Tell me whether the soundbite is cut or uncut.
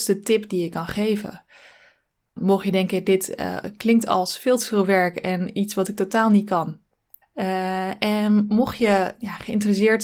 cut